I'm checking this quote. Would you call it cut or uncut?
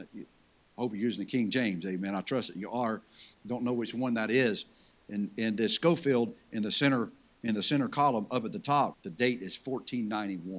cut